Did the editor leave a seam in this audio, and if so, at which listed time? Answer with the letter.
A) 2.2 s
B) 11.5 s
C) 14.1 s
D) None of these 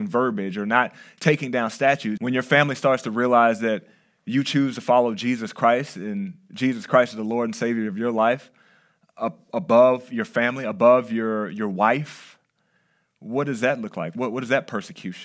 A